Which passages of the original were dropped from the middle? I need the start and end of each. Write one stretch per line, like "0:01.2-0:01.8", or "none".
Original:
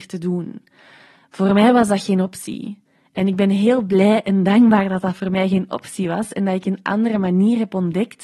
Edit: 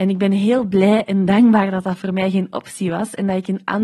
none